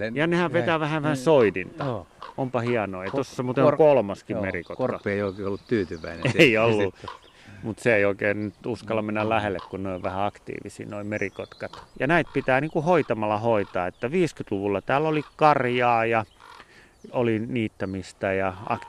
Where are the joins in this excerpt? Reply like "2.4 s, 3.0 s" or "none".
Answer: 11.9 s, 17.1 s